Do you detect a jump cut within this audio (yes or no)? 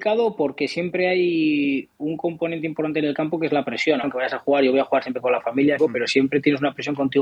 yes